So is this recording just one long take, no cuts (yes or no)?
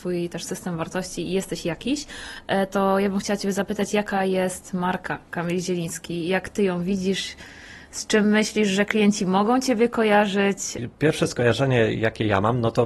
yes